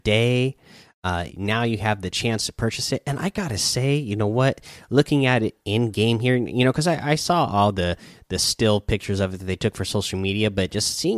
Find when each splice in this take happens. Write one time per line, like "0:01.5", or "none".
0:01.3